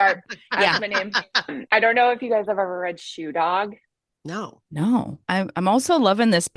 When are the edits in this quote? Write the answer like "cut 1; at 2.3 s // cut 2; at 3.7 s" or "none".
cut 1; at 1.5 s // cut 2; at 5.2 s